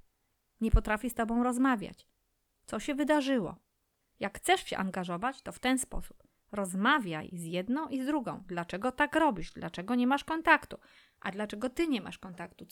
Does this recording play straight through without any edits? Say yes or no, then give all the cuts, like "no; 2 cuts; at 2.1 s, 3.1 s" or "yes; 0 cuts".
yes; 0 cuts